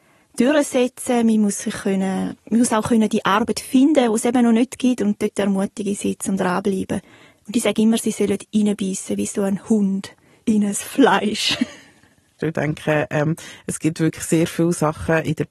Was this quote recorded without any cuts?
no; 1 cut; at 12.4 s

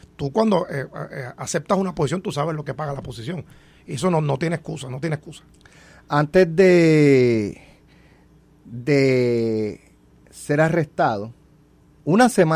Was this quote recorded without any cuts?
yes; 0 cuts

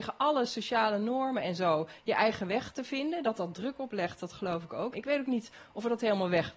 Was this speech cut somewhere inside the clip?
yes; 1 cut; at 4.9 s

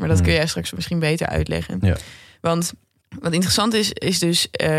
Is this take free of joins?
yes; 0 cuts

